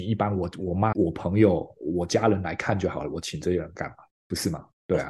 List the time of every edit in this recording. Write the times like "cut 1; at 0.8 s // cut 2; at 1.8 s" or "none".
cut 1; at 0.9 s